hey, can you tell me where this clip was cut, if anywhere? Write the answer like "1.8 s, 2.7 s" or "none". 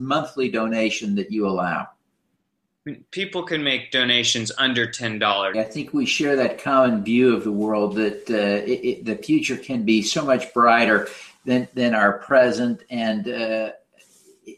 5.5 s